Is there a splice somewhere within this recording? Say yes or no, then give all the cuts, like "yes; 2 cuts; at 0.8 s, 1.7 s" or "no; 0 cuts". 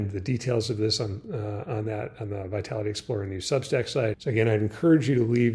yes; 1 cut; at 4.1 s